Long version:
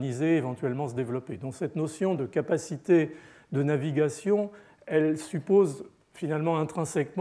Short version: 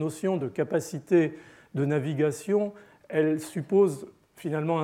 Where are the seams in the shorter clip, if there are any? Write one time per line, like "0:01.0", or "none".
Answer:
none